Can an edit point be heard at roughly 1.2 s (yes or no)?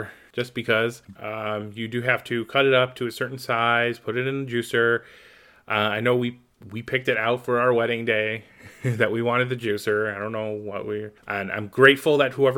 yes